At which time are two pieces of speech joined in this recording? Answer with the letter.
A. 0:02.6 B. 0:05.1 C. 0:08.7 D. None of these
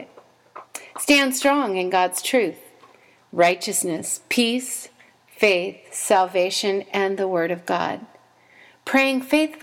D